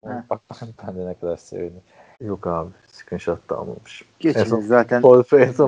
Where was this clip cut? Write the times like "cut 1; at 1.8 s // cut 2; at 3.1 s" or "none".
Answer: cut 1; at 2.1 s // cut 2; at 4.1 s